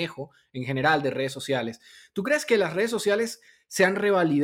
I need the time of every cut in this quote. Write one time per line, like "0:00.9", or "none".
none